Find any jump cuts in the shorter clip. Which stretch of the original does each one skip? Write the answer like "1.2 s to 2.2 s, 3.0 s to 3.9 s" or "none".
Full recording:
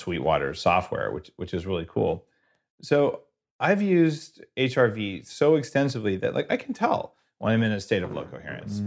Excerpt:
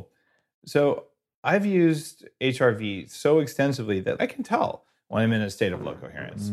6.3 s to 6.5 s